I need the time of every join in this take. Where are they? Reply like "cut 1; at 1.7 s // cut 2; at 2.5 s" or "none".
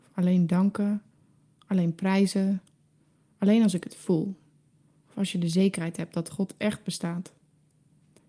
none